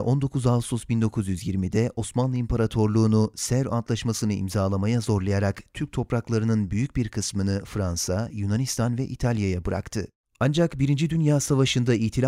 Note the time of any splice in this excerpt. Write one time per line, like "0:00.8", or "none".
0:08.3
0:10.2